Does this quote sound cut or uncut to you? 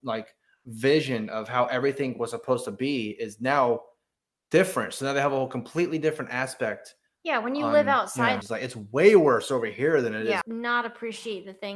cut